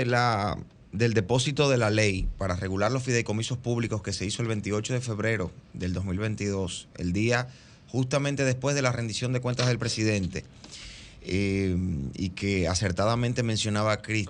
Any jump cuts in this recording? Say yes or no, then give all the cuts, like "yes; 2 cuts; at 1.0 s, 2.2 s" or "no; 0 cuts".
no; 0 cuts